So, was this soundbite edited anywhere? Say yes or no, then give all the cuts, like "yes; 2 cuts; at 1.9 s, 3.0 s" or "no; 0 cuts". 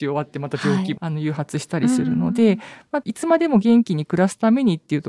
yes; 2 cuts; at 1.0 s, 3.0 s